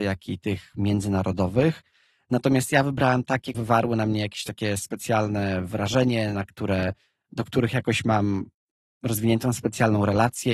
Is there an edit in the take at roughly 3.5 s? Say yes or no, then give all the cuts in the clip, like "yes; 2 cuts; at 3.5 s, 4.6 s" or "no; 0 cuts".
yes; 1 cut; at 3.5 s